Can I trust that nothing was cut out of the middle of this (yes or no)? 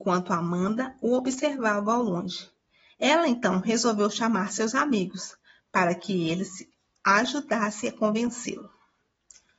yes